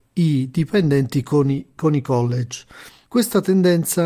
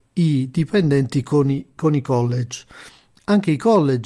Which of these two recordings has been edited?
first; 1 cut; at 3.0 s

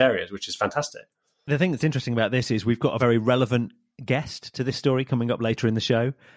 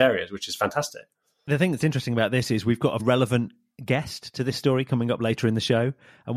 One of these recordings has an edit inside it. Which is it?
second; 1 cut; at 3.0 s

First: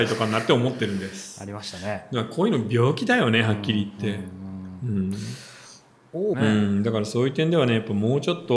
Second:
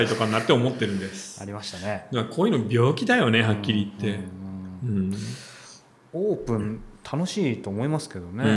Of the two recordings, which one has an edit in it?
first; 1 cut; at 6.3 s

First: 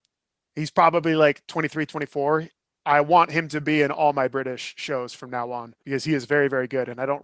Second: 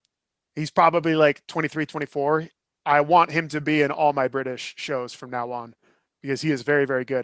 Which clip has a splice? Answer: first; 1 cut; at 5.8 s

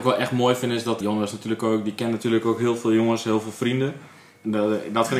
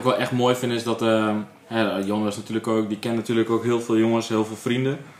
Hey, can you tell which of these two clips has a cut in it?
first; 1 cut; at 1.0 s

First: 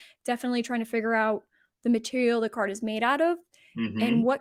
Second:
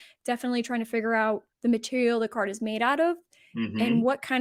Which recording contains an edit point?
second; 1 cut; at 1.5 s

